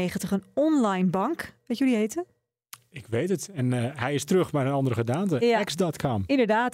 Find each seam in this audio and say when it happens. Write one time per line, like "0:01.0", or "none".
none